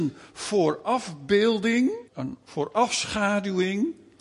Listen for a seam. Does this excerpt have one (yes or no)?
yes